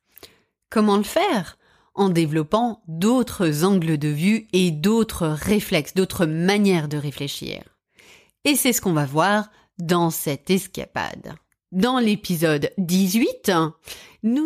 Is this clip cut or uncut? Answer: uncut